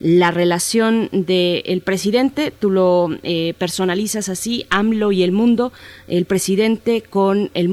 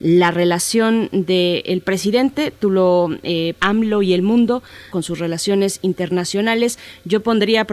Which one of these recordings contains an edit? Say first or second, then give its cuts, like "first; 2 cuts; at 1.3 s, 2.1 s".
second; 2 cuts; at 3.6 s, 4.9 s